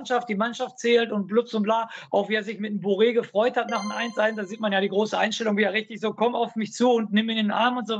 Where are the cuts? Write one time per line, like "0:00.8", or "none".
none